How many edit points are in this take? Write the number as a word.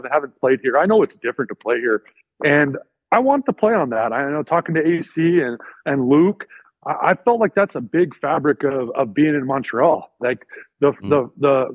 zero